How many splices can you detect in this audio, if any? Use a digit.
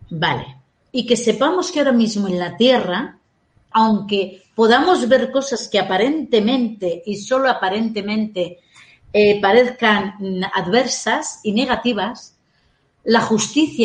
2